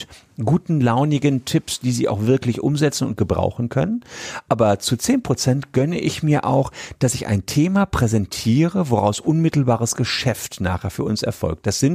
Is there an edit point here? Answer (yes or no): no